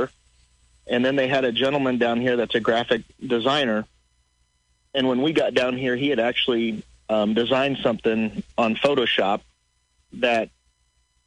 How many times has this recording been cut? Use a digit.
1